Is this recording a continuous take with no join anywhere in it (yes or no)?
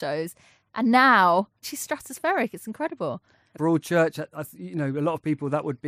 no